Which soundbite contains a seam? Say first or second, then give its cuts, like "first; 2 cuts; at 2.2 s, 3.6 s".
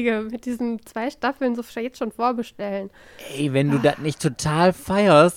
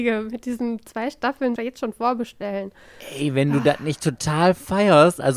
second; 1 cut; at 1.6 s